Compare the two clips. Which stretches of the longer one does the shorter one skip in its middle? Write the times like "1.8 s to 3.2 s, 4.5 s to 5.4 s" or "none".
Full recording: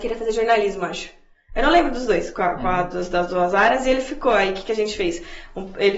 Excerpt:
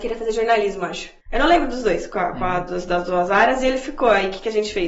1.2 s to 1.4 s